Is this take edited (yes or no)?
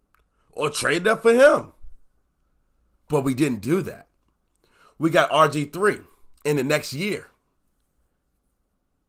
yes